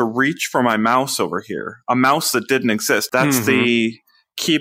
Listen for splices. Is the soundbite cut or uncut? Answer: cut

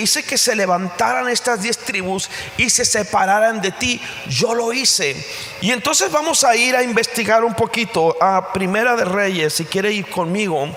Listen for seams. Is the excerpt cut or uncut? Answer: uncut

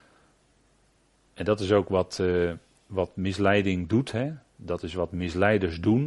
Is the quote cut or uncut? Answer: uncut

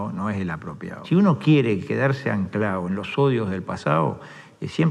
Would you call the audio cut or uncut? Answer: cut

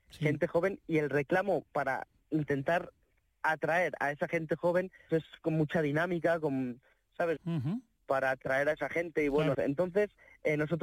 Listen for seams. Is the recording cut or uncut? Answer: cut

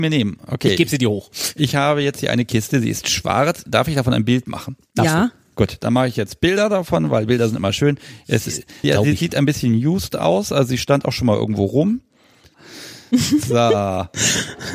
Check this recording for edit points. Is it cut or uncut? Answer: cut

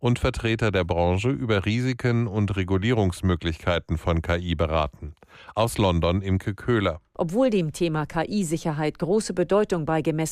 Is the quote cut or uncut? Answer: uncut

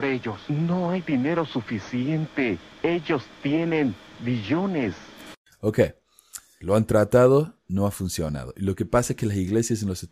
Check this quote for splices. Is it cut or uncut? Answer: cut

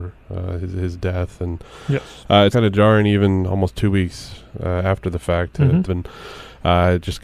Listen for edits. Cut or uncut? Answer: cut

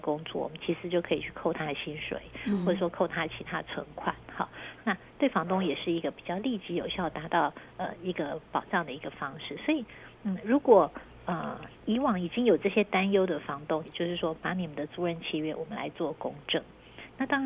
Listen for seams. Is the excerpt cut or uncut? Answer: cut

